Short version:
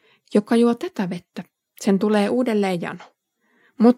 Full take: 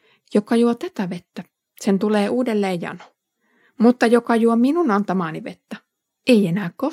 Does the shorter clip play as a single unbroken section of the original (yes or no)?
yes